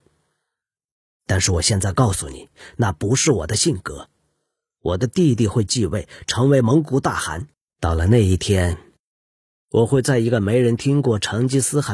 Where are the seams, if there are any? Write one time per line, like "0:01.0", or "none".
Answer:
0:07.7